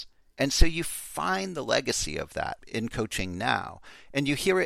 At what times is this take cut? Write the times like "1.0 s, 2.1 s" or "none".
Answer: 2.6 s